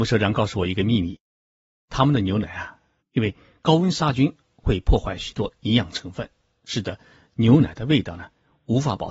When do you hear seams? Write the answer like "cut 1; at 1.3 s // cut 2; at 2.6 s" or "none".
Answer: cut 1; at 3.0 s